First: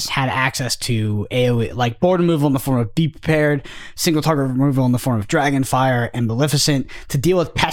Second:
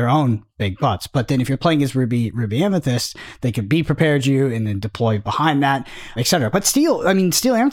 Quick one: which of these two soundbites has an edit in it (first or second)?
second